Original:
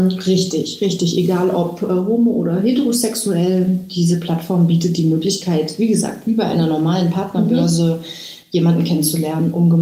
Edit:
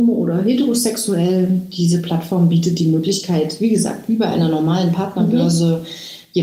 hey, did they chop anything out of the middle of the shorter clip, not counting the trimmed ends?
no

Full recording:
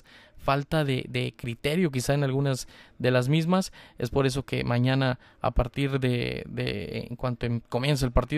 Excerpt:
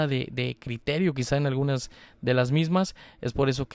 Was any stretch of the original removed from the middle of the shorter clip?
no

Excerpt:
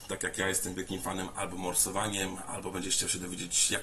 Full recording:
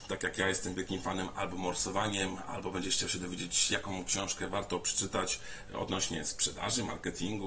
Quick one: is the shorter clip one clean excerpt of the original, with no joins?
yes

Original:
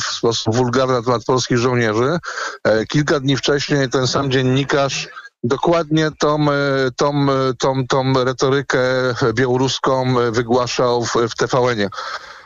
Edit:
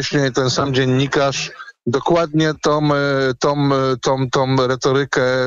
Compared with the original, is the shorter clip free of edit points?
yes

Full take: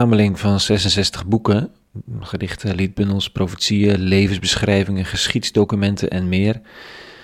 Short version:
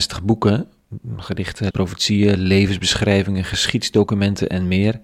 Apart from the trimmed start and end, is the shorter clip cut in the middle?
yes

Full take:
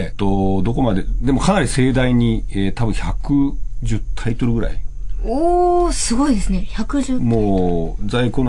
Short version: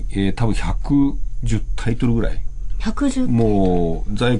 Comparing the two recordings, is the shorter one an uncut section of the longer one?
no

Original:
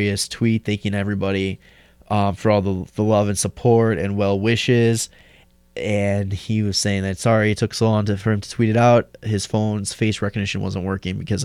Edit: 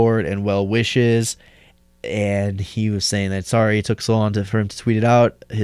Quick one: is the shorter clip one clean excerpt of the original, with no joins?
yes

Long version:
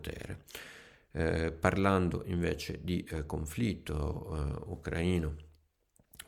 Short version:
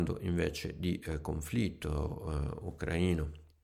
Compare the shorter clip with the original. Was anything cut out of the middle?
no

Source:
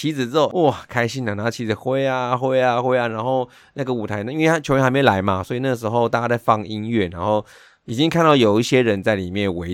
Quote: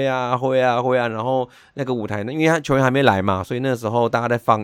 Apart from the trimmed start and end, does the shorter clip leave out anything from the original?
no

